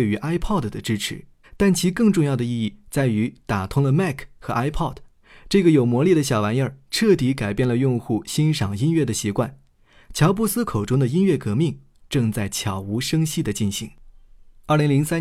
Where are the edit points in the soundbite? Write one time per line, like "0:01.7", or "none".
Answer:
0:01.4